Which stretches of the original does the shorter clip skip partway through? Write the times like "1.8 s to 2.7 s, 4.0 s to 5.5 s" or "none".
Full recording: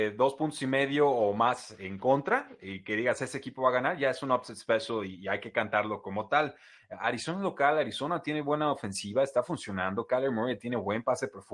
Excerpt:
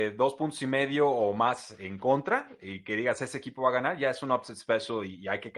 none